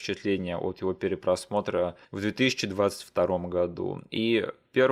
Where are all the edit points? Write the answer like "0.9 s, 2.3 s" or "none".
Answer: 2.0 s